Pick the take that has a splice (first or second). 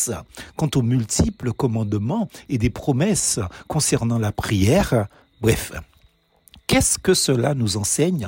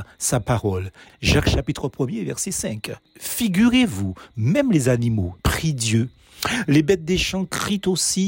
second